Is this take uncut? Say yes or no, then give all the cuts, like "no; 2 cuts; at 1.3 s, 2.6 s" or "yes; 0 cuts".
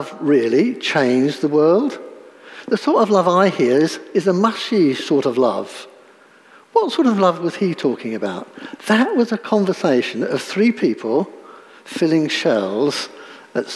yes; 0 cuts